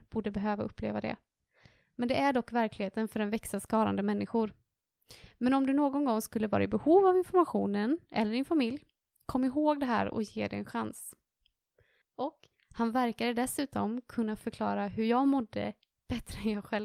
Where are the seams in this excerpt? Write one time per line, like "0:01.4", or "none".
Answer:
0:12.0